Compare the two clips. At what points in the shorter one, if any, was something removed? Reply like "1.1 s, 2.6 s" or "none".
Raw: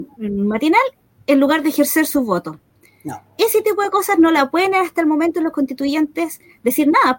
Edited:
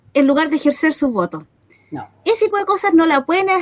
2.5 s